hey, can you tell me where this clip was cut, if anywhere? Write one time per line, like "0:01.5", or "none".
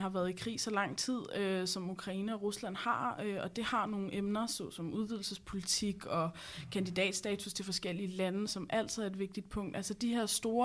0:08.5

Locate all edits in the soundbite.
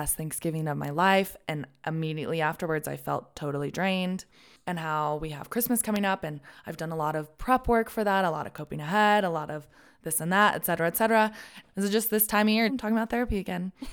0:11.6
0:12.7

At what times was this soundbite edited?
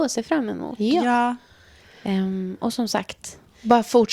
none

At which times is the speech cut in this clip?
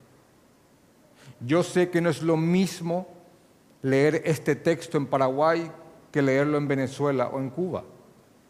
none

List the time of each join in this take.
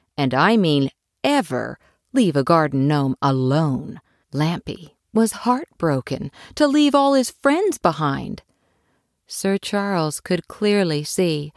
0:04.2

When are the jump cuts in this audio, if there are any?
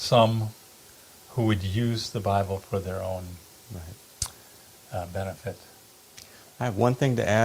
none

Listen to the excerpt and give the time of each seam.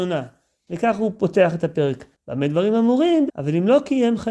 0:02.1
0:03.3

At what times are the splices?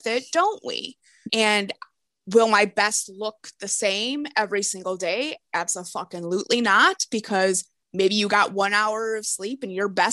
0:01.3

